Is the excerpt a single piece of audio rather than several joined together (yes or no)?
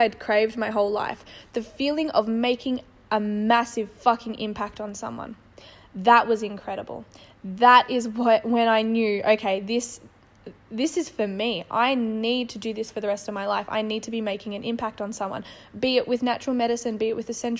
yes